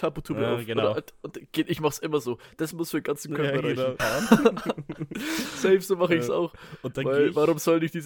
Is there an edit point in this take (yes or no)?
yes